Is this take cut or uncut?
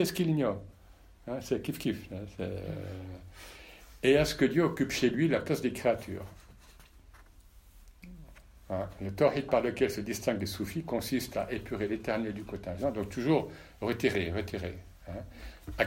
uncut